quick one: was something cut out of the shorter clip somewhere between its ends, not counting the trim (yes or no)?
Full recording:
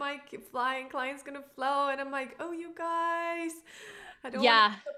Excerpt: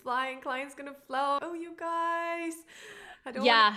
yes